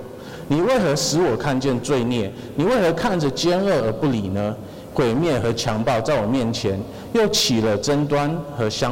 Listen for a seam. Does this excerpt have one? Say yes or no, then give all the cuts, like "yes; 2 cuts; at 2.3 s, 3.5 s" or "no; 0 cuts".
no; 0 cuts